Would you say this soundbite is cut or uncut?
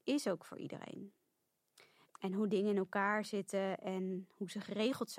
cut